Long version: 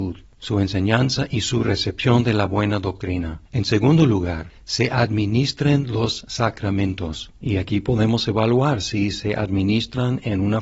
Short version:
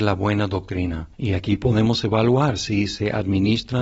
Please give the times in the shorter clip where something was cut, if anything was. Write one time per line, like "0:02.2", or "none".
0:01.1